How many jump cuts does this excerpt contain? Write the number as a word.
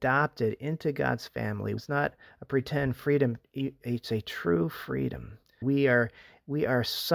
two